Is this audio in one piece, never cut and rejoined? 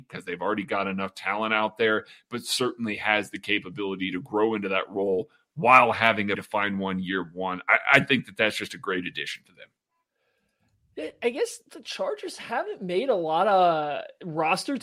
no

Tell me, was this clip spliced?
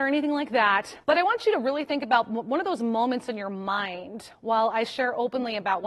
yes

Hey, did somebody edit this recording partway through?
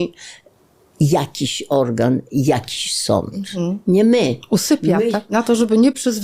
yes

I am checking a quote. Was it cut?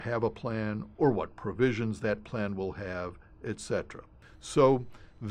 yes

